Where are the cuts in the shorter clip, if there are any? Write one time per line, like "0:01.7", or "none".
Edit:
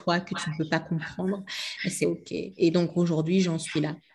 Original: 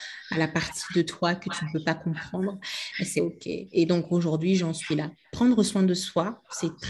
none